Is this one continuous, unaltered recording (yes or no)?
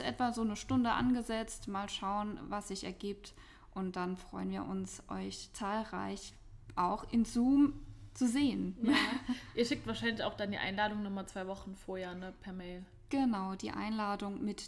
yes